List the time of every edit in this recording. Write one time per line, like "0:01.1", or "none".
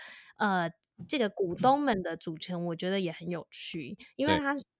none